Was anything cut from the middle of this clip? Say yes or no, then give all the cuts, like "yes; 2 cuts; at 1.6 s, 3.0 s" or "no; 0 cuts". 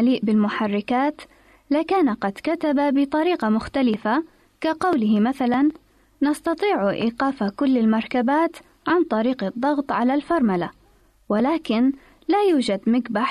no; 0 cuts